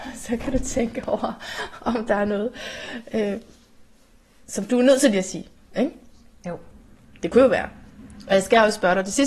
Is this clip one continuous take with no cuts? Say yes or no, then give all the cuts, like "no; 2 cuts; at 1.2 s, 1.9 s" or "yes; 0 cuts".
yes; 0 cuts